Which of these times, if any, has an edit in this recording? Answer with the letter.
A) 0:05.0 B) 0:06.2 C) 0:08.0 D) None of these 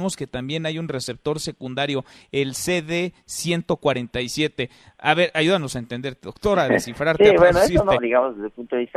C